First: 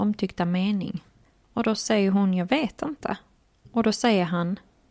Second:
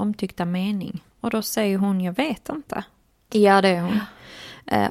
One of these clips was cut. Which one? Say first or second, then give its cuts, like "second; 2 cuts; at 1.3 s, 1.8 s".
second; 2 cuts; at 1.1 s, 3.3 s